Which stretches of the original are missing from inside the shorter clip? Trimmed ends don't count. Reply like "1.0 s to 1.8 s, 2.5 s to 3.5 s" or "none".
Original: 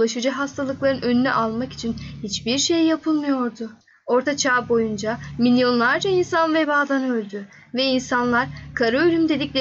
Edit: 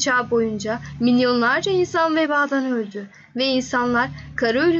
none